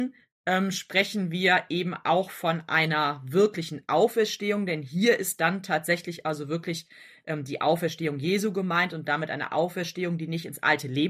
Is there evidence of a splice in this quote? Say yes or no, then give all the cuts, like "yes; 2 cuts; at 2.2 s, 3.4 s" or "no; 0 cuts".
no; 0 cuts